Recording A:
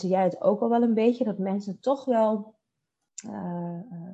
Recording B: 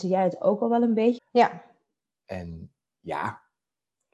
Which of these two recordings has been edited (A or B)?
B